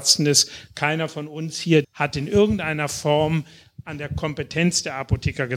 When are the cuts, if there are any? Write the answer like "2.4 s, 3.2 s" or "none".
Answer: 1.8 s